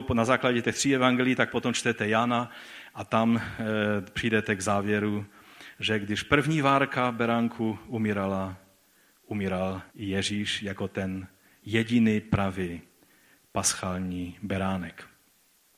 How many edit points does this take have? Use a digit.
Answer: 1